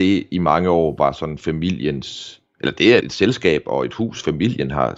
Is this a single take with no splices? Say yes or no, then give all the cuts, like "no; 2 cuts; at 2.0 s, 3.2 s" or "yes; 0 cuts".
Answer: no; 1 cut; at 3.0 s